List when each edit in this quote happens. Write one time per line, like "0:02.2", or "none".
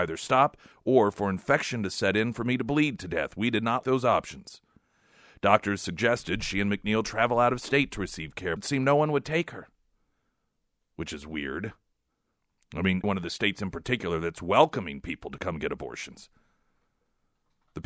0:03.8
0:08.6
0:13.0